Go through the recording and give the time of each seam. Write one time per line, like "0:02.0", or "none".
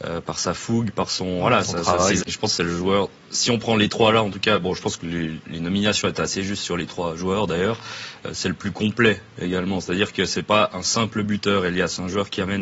0:02.2